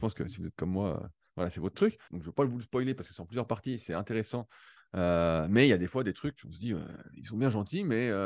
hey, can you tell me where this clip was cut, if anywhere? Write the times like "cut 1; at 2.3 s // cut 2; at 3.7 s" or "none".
cut 1; at 2.1 s // cut 2; at 4.8 s